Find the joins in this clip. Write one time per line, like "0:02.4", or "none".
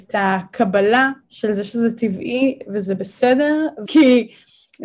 0:01.2
0:03.9